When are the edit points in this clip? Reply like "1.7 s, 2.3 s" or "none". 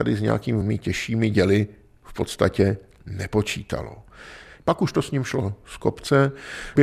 4.6 s